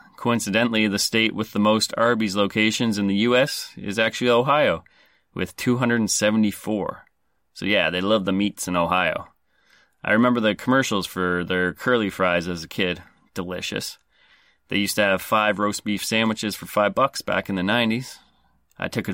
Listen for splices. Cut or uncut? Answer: uncut